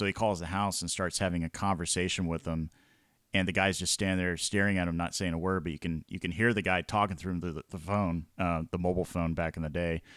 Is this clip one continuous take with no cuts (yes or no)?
yes